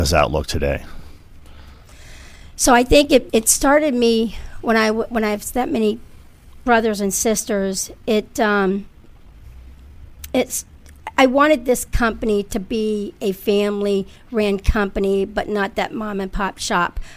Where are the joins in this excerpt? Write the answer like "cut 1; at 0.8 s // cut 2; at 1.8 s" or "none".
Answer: cut 1; at 3.3 s